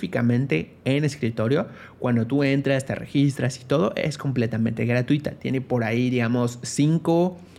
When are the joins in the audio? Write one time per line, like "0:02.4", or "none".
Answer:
none

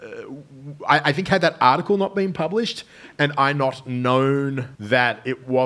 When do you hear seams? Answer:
0:04.8

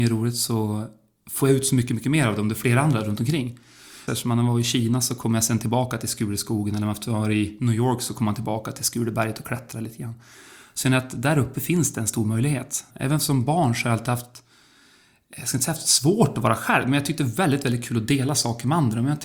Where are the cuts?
0:04.1
0:12.9

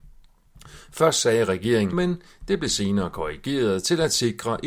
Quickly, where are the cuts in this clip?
0:01.9

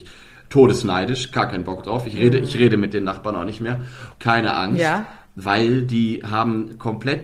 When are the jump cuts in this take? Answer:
0:04.1
0:05.2

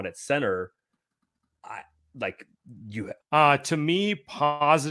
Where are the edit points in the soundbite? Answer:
0:03.2

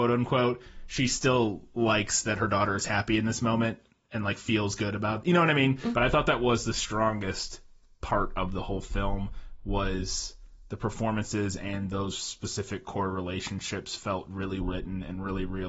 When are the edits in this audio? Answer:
0:05.9
0:14.6

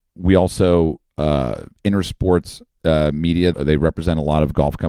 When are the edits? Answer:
0:03.5

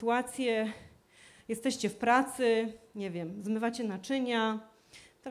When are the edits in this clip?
none

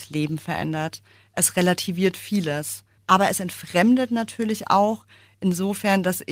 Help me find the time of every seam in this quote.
0:03.0

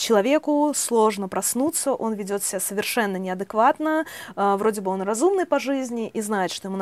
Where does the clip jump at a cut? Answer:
none

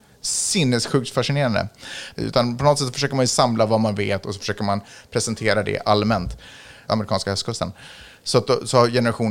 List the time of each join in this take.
0:02.1
0:06.9

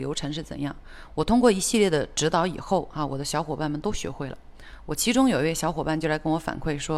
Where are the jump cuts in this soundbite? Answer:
none

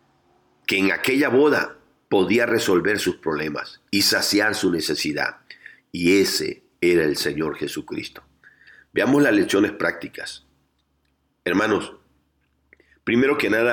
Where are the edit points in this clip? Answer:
none

